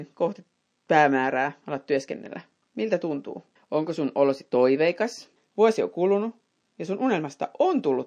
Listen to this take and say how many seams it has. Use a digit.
2